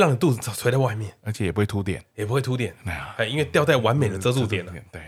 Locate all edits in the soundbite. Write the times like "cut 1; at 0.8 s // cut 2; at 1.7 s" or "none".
none